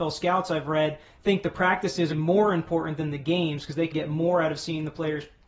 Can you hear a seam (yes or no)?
yes